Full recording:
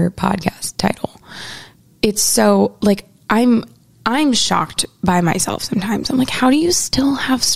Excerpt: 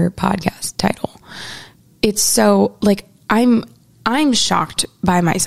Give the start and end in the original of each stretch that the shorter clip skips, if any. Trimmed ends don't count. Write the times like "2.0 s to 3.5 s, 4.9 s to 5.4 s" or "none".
none